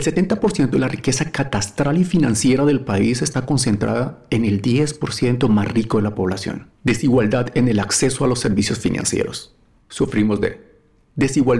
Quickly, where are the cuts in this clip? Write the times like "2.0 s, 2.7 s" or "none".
6.8 s, 9.8 s